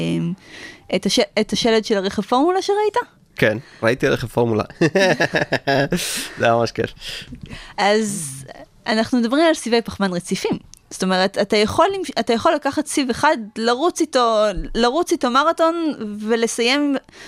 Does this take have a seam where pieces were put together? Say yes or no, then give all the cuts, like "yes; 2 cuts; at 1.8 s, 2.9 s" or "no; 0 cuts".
no; 0 cuts